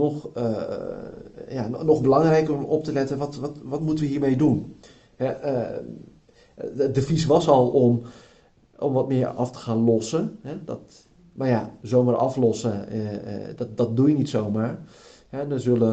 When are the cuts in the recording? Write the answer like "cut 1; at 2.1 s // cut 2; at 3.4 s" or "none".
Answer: none